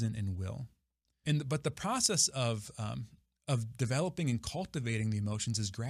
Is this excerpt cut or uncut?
cut